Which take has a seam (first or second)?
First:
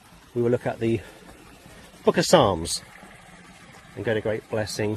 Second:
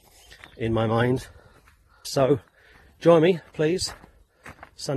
second